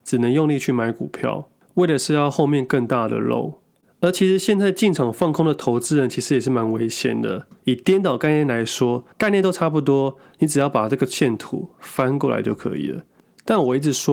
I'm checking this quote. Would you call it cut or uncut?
cut